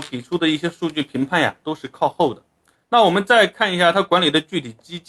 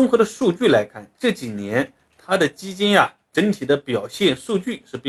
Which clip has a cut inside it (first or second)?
first